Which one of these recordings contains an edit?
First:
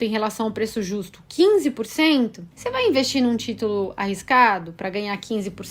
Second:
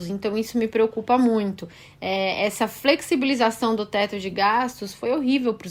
first; 1 cut; at 2.5 s

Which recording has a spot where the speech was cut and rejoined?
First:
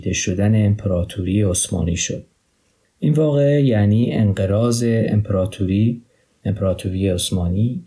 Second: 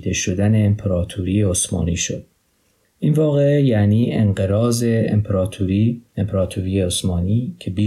second; 1 cut; at 6.1 s

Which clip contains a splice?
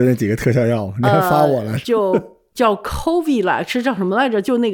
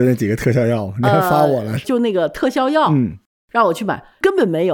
second; 1 cut; at 1.8 s

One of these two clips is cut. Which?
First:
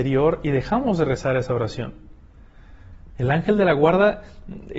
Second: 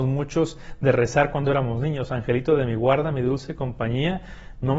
first; 1 cut; at 3.1 s

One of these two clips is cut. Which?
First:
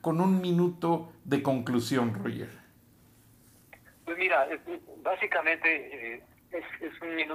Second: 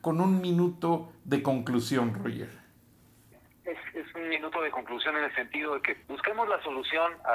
second; 2 cuts; at 3.3 s, 6.0 s

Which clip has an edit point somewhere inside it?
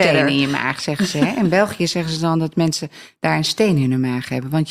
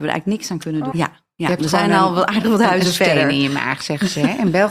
second; 1 cut; at 0.9 s

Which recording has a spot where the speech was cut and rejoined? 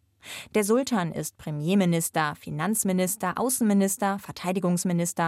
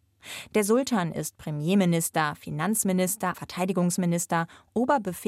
second; 1 cut; at 3.3 s

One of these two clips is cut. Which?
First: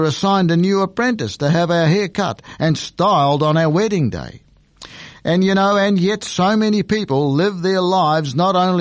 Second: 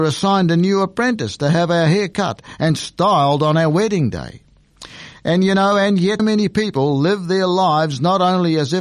second; 1 cut; at 6.2 s

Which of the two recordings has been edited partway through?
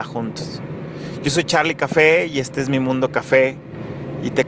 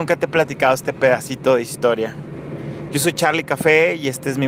second; 1 cut; at 2.9 s

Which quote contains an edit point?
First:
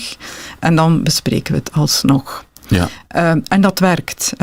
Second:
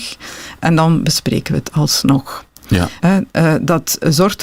second; 1 cut; at 3.0 s

